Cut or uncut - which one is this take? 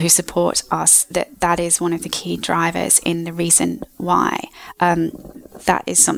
uncut